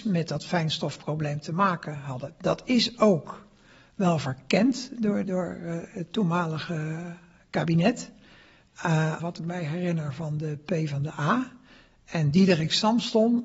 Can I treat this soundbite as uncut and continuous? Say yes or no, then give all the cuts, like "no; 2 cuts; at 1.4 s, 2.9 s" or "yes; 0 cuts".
no; 2 cuts; at 5.2 s, 9.2 s